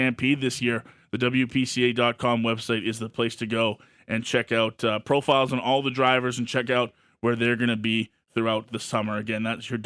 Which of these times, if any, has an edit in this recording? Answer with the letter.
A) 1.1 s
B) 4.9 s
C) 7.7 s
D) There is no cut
D